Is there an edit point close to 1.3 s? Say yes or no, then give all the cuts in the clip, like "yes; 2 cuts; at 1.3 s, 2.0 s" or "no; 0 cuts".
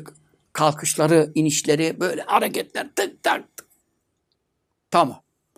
no; 0 cuts